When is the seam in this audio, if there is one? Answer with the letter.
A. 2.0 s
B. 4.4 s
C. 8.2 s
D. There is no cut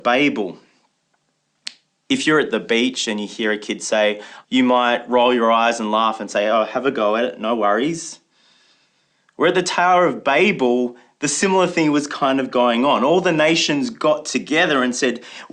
B